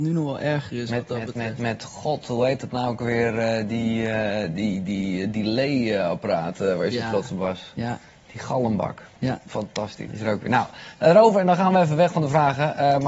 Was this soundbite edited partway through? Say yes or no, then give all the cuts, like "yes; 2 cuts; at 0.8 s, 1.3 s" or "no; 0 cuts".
yes; 1 cut; at 10.1 s